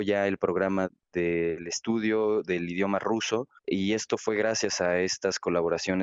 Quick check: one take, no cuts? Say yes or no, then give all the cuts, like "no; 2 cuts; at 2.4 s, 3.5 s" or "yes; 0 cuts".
no; 1 cut; at 3.6 s